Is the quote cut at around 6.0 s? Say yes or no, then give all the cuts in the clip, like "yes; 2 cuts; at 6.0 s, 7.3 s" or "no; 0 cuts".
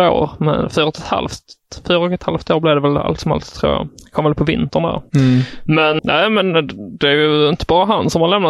yes; 1 cut; at 6.0 s